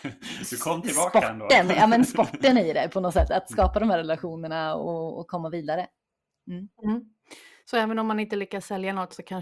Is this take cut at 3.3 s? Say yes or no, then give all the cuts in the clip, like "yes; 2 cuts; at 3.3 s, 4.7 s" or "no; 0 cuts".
yes; 1 cut; at 3.3 s